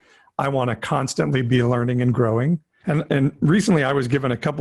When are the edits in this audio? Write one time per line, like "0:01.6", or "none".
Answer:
0:02.8